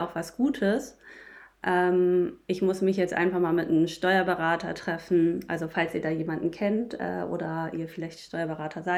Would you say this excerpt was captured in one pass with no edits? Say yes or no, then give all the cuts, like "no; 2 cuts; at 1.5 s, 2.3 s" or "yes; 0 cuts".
yes; 0 cuts